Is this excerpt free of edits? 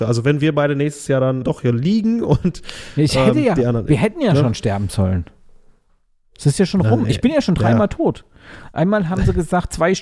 no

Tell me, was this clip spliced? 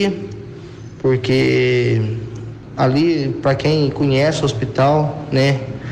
no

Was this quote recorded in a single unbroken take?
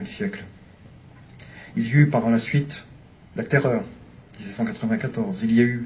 yes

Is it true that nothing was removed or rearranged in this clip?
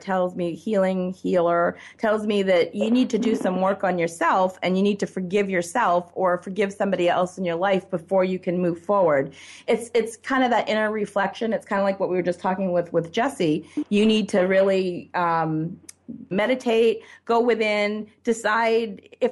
no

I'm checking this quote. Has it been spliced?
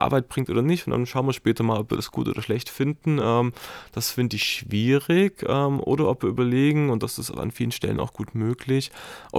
no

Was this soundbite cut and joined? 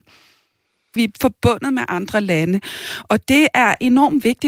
yes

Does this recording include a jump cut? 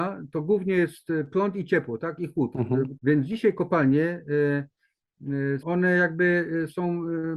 yes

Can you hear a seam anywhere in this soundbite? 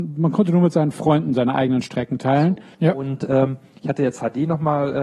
yes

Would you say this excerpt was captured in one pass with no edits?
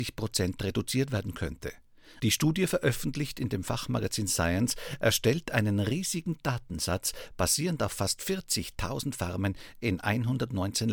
no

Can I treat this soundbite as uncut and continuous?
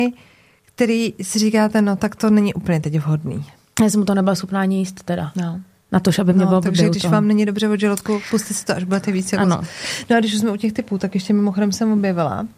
yes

